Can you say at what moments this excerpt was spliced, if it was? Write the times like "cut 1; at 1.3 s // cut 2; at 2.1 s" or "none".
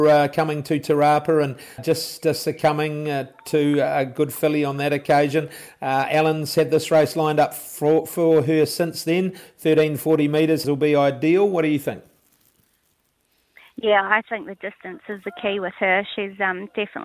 cut 1; at 1.8 s // cut 2; at 10.6 s